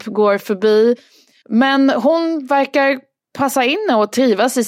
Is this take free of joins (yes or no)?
no